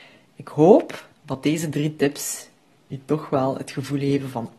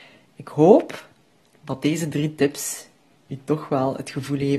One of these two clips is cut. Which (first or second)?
first